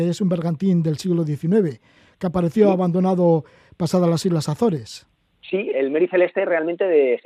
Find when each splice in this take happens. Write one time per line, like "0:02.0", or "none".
0:05.7